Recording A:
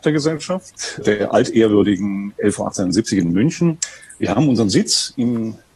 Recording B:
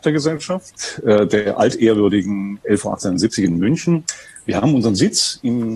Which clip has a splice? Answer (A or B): A